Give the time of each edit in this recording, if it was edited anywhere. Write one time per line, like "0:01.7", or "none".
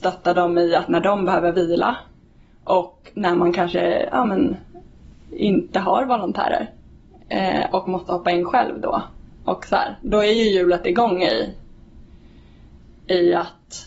none

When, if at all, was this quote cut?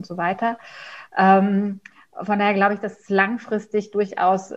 none

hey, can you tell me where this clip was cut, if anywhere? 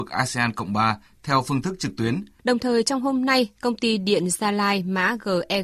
0:02.4

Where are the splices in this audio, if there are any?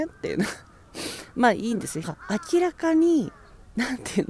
0:02.0

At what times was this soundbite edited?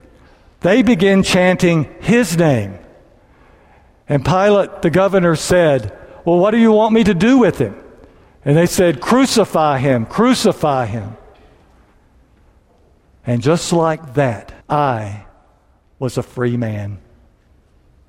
0:10.1
0:14.6

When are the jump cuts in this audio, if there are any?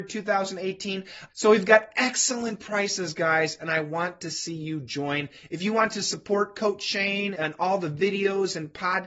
0:01.3
0:07.3

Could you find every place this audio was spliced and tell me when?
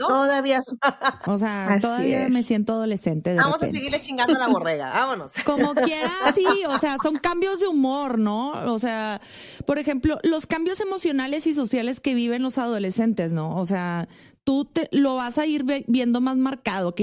0:01.2

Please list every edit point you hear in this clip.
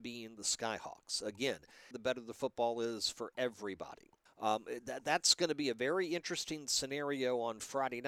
0:01.9
0:04.3

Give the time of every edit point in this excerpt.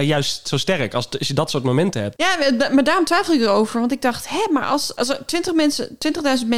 none

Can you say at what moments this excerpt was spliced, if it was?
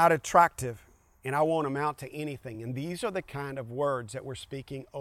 none

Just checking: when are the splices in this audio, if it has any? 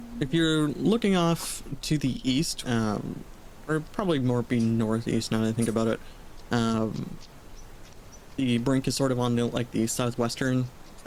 0:02.6

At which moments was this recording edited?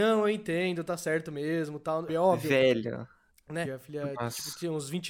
0:02.1
0:03.6

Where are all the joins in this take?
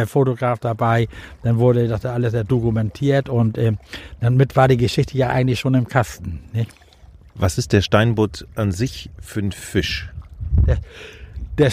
none

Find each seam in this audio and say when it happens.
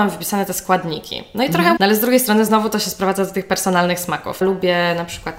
0:01.8
0:04.4

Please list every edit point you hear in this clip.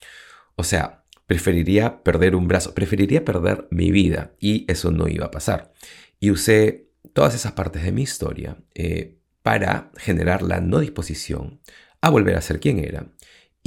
none

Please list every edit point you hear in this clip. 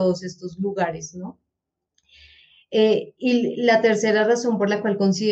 none

